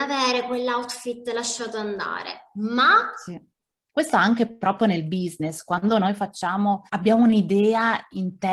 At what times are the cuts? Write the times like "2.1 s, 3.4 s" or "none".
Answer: 3.9 s, 6.9 s